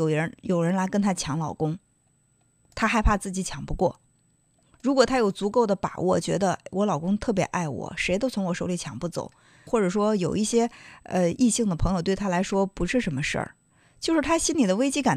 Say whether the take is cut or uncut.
cut